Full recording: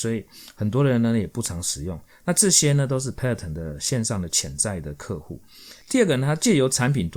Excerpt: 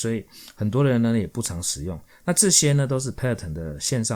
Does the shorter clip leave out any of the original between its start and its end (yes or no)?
no